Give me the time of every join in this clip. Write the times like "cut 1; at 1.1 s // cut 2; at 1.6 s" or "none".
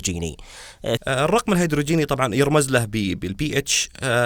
cut 1; at 1.0 s

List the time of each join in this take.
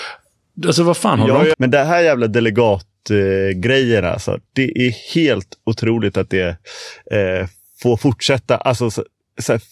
cut 1; at 1.5 s

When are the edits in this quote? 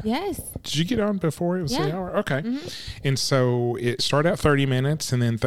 none

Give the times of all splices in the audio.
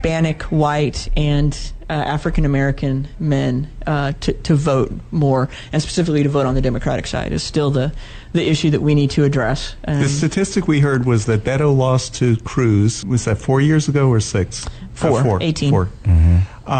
cut 1; at 13.0 s

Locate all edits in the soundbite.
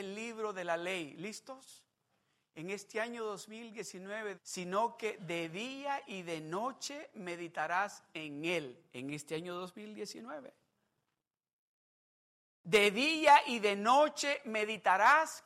cut 1; at 4.3 s

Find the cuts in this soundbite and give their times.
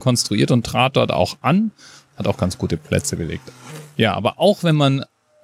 none

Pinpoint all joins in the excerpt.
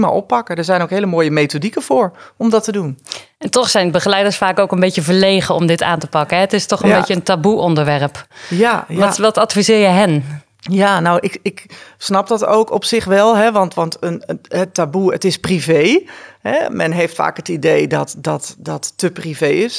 none

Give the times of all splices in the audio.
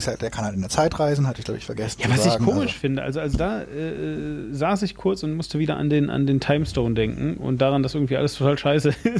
none

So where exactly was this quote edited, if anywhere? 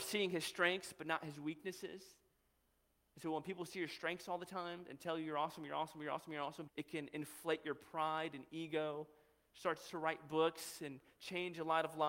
cut 1; at 6.7 s

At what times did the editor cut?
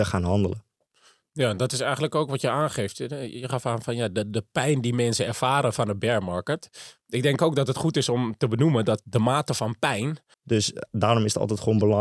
cut 1; at 10.3 s

